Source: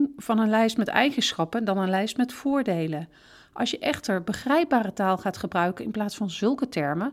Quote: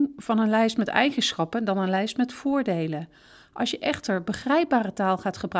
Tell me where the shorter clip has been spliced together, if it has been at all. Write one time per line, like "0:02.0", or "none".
none